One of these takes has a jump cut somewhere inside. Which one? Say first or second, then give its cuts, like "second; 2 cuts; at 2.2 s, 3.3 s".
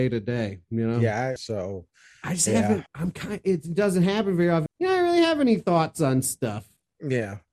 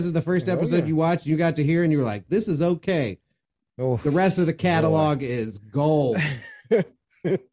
first; 3 cuts; at 1.4 s, 2.9 s, 4.7 s